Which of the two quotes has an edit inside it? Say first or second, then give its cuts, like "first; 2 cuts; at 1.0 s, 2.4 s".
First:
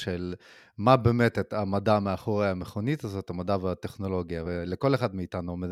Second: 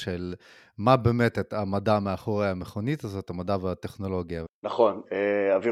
second; 1 cut; at 4.5 s